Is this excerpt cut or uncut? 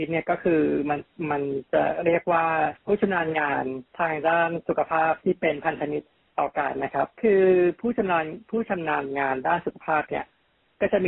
cut